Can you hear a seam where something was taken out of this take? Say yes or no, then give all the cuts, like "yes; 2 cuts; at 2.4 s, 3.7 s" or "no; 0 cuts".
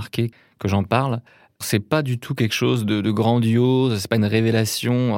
no; 0 cuts